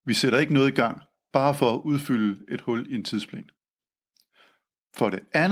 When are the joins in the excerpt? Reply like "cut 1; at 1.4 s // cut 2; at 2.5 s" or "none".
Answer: none